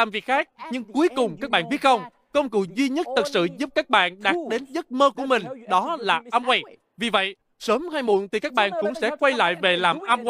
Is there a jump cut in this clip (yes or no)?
no